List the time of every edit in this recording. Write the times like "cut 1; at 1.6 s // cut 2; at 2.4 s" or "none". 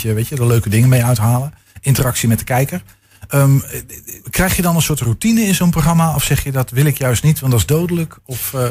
cut 1; at 4.2 s